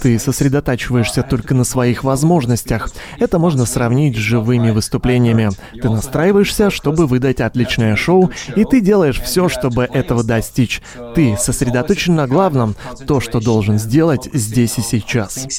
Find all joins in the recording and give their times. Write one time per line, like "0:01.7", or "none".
none